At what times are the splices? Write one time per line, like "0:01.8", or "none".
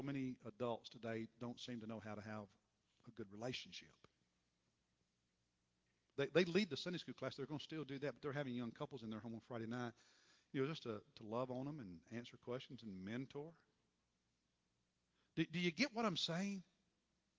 0:06.2